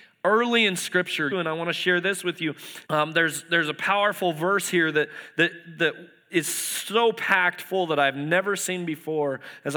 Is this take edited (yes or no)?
yes